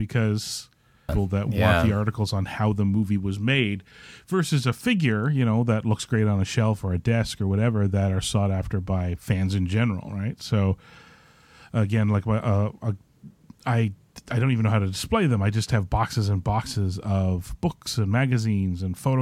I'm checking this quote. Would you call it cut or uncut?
cut